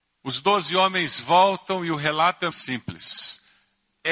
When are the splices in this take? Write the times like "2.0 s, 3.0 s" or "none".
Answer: 2.5 s